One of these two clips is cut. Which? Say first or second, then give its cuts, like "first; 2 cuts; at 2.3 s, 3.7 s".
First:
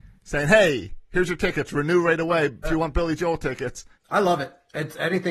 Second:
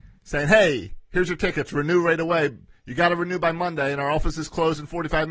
first; 2 cuts; at 2.6 s, 3.9 s